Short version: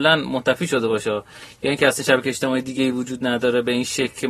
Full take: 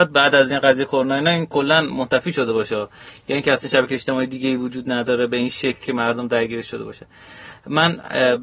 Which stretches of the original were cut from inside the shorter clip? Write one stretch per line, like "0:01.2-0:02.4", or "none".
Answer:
none